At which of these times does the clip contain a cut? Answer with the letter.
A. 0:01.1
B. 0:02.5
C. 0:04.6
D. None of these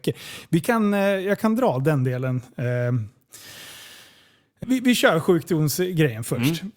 C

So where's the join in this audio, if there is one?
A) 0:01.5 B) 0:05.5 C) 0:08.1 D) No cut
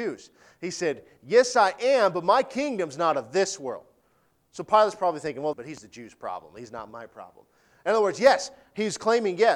B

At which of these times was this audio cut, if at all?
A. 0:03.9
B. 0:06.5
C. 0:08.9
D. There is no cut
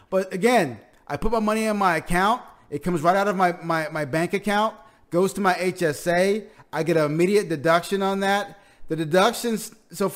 D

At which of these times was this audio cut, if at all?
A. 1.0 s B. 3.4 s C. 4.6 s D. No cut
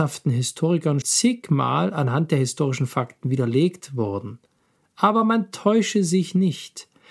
A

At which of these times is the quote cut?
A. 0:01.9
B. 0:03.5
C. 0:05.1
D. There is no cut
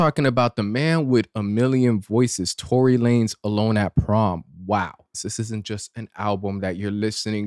C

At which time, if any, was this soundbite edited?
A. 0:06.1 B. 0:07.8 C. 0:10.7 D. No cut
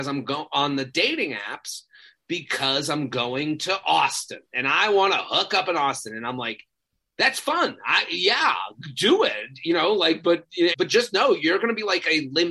C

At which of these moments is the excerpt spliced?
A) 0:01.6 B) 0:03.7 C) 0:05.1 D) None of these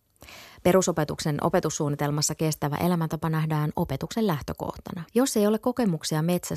C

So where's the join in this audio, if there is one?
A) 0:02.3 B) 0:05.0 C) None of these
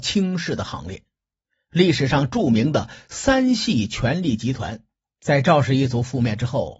B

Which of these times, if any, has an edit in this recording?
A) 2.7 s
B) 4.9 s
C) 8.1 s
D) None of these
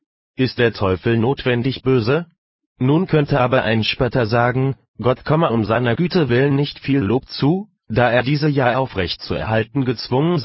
A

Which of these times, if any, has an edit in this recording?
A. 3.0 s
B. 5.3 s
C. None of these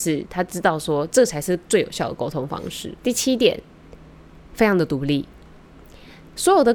A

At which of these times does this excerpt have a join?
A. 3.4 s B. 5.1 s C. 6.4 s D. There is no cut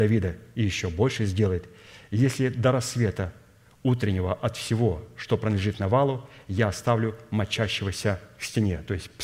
D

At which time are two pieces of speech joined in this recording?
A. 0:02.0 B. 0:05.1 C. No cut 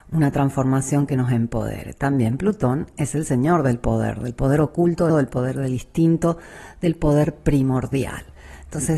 B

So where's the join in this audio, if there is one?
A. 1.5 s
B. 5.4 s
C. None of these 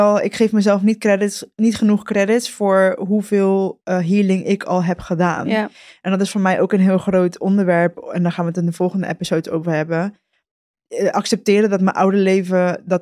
C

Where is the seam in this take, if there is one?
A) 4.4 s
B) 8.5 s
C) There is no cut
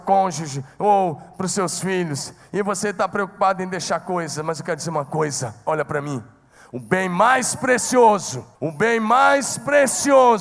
B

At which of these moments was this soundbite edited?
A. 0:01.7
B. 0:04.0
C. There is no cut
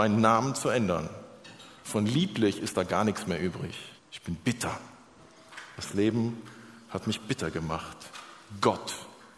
B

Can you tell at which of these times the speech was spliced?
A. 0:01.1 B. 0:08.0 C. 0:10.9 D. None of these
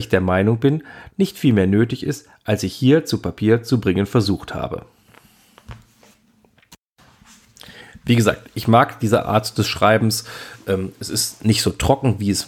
A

